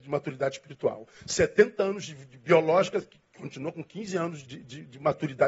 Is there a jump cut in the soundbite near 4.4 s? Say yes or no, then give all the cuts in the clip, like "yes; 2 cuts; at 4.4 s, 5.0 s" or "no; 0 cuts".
yes; 1 cut; at 4.4 s